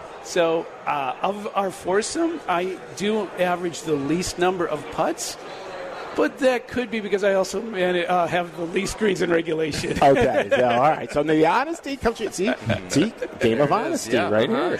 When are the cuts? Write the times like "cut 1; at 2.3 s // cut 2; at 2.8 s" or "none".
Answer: none